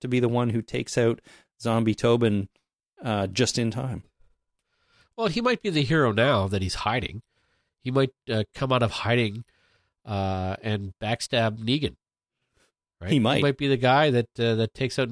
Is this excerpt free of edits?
yes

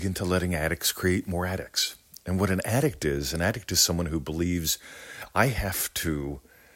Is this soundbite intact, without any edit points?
yes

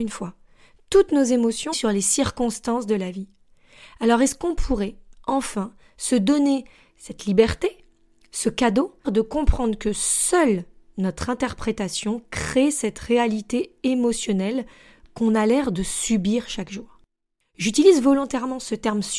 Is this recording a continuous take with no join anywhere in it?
no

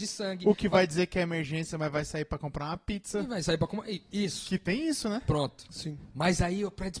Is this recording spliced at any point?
no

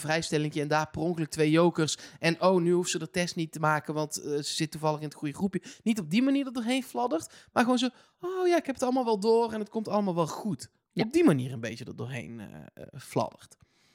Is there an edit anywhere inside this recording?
no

